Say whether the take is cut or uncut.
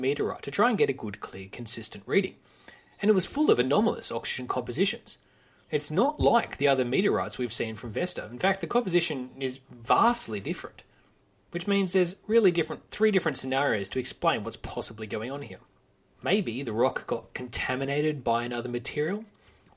uncut